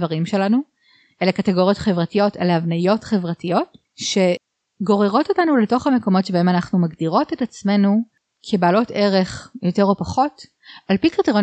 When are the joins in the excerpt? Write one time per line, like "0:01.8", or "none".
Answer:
0:03.9